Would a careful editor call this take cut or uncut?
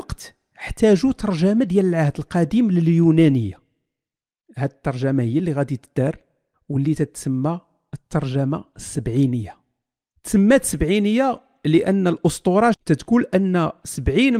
cut